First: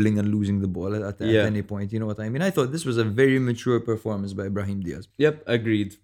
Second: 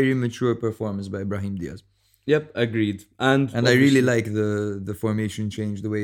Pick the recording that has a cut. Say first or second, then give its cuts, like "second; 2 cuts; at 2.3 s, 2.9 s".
first; 1 cut; at 5.1 s